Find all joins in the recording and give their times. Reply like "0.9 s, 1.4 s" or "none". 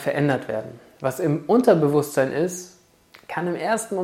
none